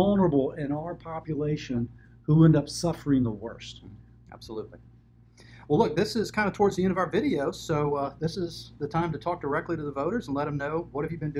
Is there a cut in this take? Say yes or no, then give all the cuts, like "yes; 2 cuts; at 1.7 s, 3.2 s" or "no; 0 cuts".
yes; 1 cut; at 4.3 s